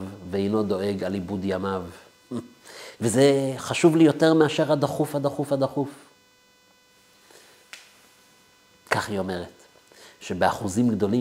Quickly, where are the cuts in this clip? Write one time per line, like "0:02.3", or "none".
0:02.9